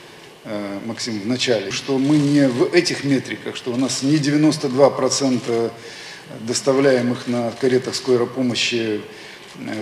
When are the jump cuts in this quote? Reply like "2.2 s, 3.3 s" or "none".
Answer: 1.7 s